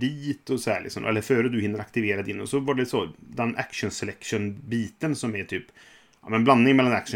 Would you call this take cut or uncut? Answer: uncut